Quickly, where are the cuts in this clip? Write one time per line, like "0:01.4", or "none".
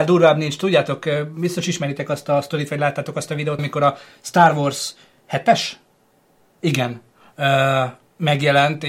0:03.6